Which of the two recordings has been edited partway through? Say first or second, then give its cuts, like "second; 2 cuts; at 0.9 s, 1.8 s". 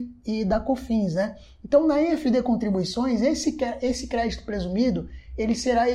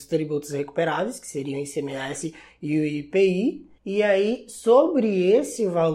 second; 1 cut; at 3.8 s